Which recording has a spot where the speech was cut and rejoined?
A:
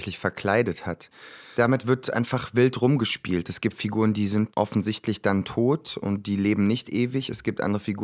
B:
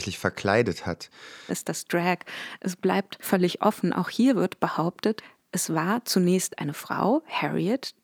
B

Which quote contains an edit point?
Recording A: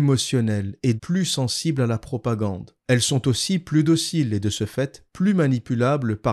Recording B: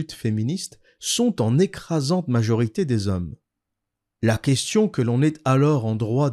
A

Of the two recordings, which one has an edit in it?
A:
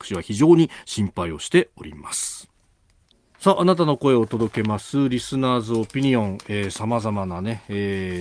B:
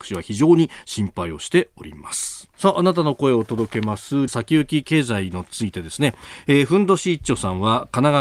B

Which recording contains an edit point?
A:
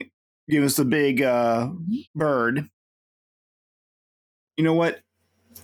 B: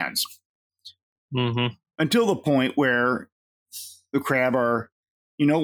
A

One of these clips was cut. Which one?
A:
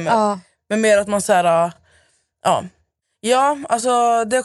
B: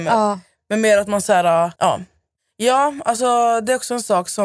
B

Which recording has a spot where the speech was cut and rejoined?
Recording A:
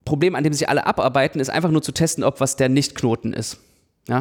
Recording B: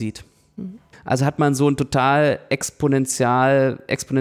B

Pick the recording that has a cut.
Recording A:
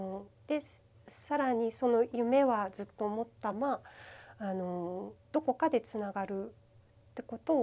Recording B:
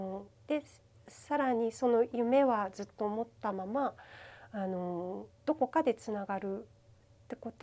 A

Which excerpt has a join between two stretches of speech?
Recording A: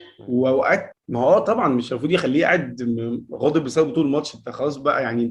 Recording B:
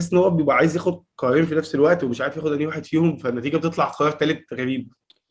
A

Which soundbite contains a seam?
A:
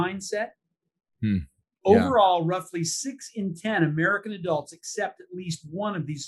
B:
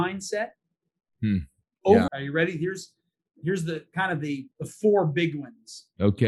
B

